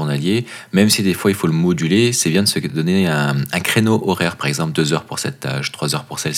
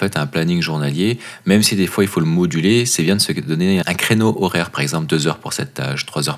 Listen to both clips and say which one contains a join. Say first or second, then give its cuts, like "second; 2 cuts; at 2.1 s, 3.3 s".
second; 1 cut; at 3.8 s